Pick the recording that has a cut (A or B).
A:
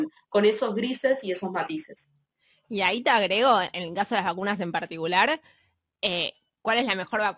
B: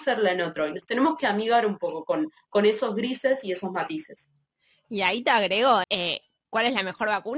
B